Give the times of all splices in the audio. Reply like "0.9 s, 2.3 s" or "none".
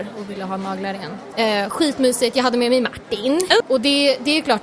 1.3 s, 3.6 s